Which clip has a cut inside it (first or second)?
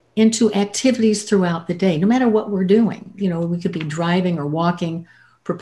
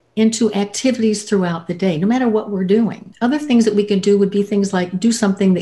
second